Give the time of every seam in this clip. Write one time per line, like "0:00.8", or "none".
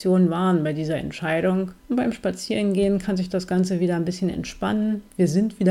none